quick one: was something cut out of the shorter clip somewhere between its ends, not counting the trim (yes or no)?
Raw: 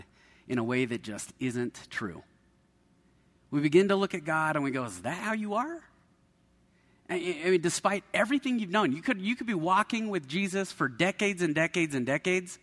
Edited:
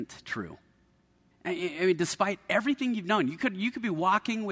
yes